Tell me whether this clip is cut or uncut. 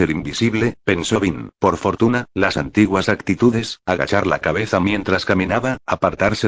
cut